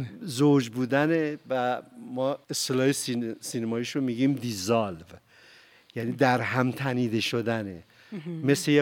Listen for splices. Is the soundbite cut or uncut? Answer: cut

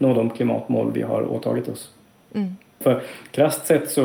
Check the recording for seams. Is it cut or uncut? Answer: cut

